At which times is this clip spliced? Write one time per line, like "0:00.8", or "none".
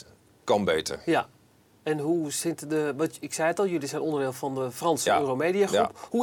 none